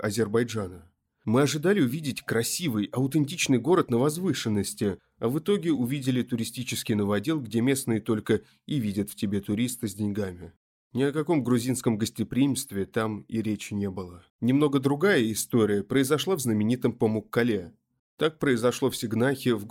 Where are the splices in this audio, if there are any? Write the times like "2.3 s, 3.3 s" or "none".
14.3 s, 18.0 s